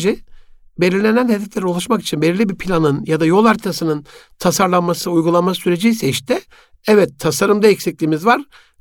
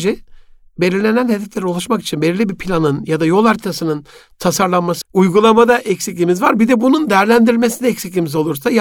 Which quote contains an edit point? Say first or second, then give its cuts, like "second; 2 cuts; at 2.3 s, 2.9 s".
second; 1 cut; at 5.0 s